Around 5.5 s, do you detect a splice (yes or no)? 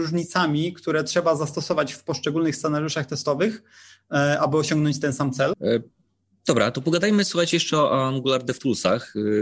yes